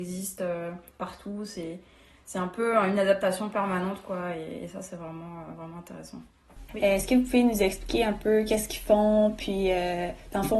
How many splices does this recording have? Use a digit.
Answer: 1